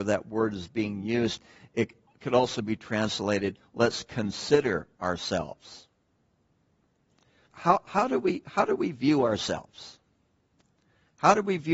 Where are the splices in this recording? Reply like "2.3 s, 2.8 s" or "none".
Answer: 7.5 s